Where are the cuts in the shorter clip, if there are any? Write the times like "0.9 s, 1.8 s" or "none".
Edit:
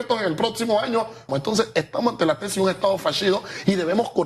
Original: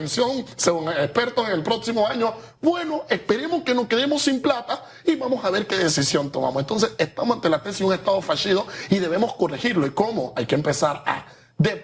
1.3 s